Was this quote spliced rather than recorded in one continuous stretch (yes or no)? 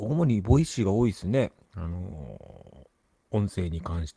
no